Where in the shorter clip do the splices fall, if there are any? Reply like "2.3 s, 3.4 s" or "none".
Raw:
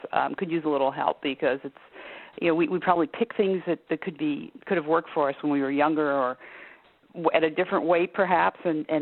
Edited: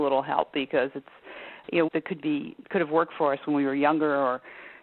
1.9 s